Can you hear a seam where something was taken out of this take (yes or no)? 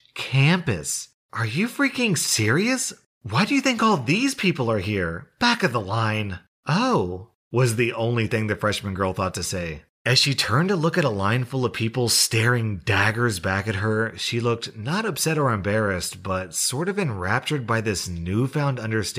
no